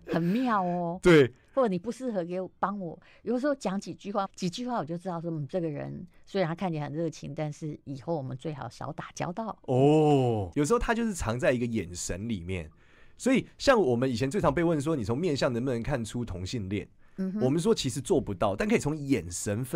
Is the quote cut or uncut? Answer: cut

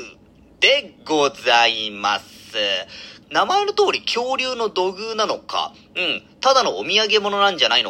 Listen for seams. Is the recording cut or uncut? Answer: cut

